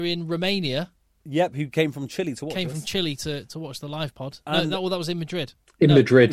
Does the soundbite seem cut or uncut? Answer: uncut